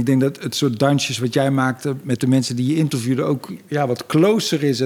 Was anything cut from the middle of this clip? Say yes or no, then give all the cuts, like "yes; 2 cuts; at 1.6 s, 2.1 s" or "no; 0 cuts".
no; 0 cuts